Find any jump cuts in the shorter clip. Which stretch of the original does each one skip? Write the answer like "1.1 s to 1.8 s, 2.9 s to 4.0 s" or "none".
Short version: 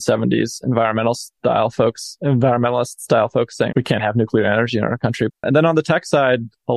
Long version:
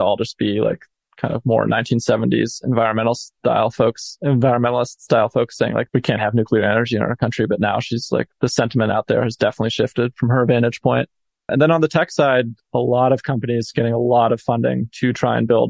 5.7 s to 5.9 s, 7.5 s to 11.3 s